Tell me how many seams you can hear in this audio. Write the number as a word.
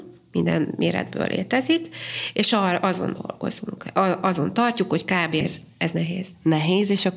one